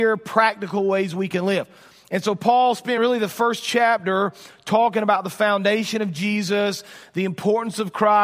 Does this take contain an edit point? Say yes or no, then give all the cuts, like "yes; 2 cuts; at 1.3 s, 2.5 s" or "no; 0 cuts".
no; 0 cuts